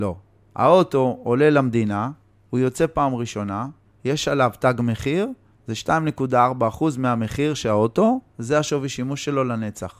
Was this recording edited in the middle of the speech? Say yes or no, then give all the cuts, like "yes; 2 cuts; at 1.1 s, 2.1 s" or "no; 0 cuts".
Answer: no; 0 cuts